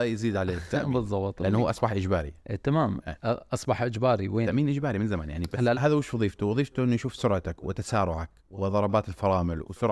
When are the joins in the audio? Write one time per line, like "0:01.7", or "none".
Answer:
0:05.7
0:08.4